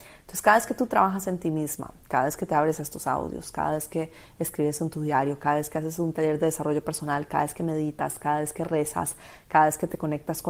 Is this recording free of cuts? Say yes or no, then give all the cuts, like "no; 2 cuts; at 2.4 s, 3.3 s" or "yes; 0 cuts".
yes; 0 cuts